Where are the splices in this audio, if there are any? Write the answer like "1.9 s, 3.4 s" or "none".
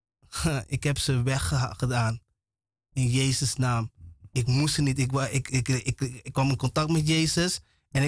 none